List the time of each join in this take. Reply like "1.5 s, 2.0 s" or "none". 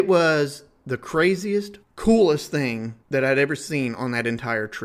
1.8 s, 3.0 s